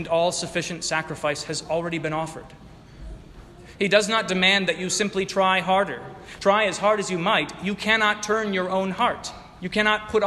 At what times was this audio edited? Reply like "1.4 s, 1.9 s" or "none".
none